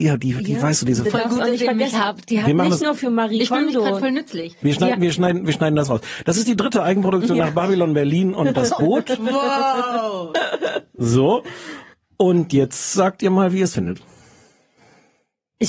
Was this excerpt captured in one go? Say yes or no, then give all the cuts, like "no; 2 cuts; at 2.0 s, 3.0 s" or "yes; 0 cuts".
yes; 0 cuts